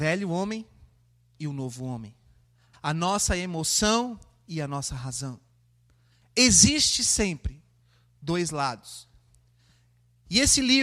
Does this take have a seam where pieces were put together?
yes; 1 cut; at 2.7 s

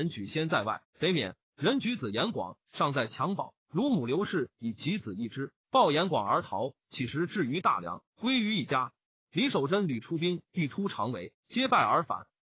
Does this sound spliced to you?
yes; 1 cut; at 1.4 s

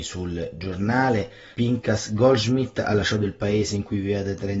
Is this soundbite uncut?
no; 1 cut; at 1.5 s

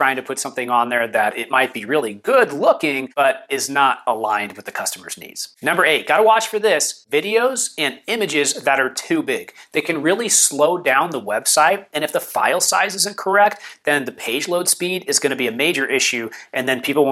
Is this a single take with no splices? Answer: yes; 0 cuts

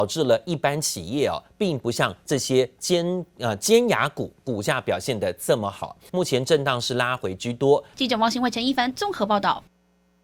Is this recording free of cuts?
no; 2 cuts; at 6.1 s, 7.9 s

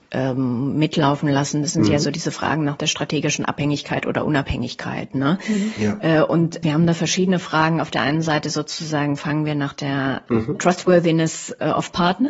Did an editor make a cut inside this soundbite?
yes; 1 cut; at 6.6 s

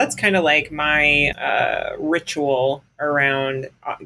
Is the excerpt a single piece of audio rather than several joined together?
no; 1 cut; at 1.3 s

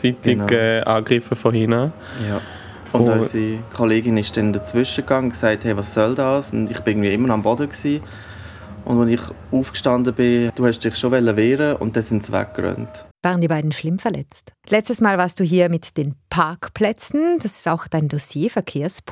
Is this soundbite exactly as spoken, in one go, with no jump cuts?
no; 3 cuts; at 10.5 s, 13.1 s, 14.6 s

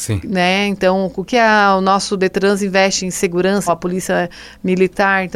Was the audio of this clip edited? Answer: yes; 2 cuts; at 1.3 s, 3.7 s

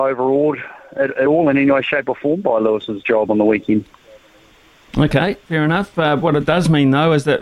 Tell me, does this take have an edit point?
no; 0 cuts

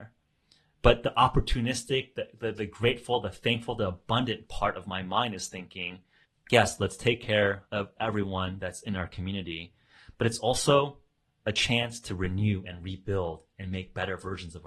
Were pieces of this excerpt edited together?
no; 0 cuts

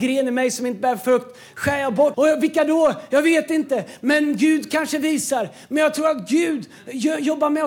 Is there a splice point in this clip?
yes; 1 cut; at 2.1 s

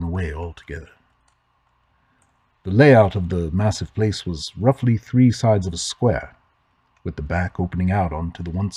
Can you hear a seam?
no; 0 cuts

